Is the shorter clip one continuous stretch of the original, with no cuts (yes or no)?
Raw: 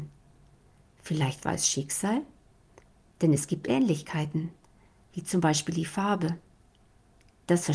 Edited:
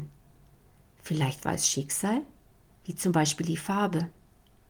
no